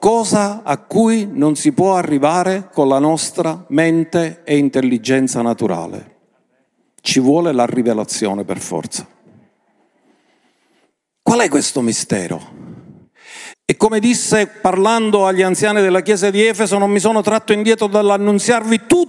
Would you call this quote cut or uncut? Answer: cut